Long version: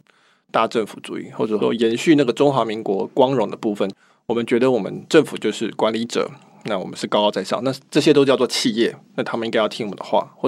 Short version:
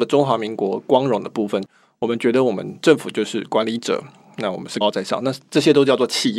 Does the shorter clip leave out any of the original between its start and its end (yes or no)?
yes